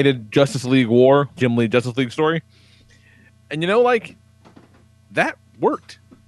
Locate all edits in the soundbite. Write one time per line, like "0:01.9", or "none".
0:01.4